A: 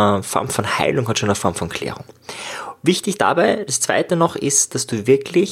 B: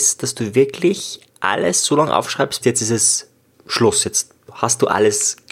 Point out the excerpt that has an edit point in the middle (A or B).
B